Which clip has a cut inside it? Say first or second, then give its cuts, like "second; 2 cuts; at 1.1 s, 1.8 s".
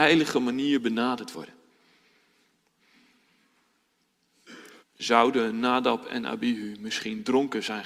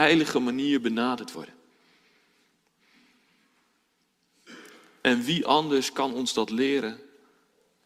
first; 1 cut; at 4.8 s